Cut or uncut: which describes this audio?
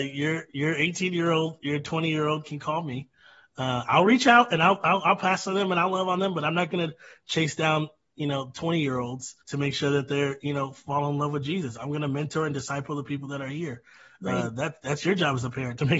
cut